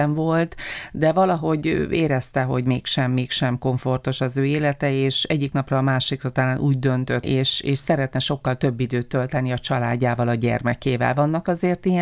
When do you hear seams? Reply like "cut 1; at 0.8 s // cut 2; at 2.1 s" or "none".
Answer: cut 1; at 7.2 s